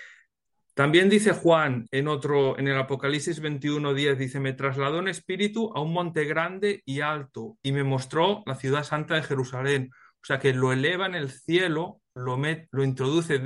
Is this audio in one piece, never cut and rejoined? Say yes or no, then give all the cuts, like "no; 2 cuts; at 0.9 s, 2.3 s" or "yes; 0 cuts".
no; 1 cut; at 1.9 s